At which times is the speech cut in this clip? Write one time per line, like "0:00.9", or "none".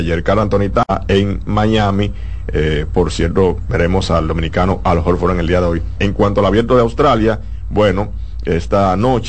0:06.0